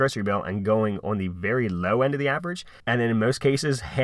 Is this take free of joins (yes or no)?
no